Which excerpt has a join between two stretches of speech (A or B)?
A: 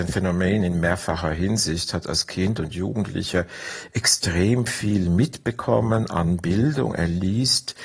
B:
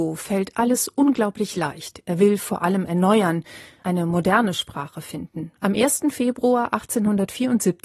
B